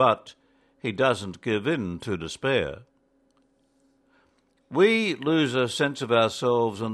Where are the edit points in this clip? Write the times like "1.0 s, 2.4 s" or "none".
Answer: none